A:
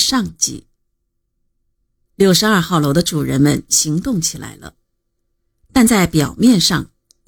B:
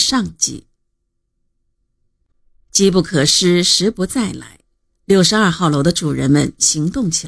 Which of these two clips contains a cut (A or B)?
A